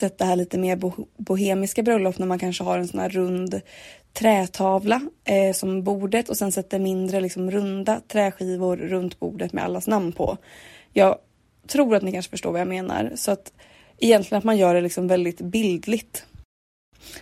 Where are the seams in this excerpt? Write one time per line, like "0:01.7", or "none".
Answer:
none